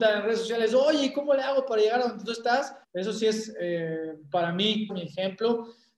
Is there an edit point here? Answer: yes; 2 cuts; at 2.8 s, 4.9 s

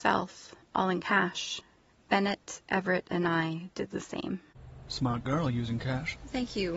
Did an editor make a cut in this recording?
no; 0 cuts

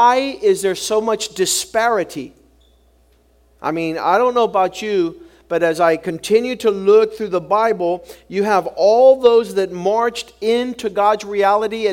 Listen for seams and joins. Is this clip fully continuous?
yes; 0 cuts

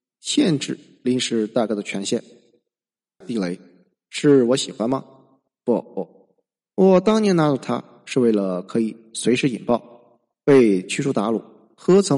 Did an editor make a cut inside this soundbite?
yes; 1 cut; at 3.2 s

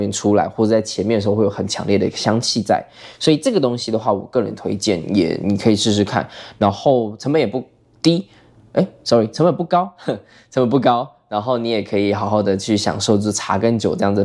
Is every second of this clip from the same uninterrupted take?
yes; 0 cuts

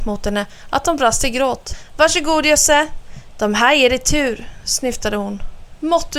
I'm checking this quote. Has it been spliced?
no; 0 cuts

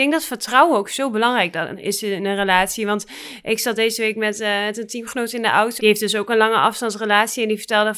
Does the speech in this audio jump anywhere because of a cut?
yes; 1 cut; at 5.8 s

